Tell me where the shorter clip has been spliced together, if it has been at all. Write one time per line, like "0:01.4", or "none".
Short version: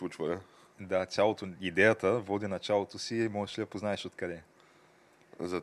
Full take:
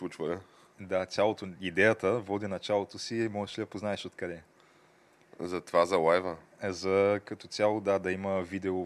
none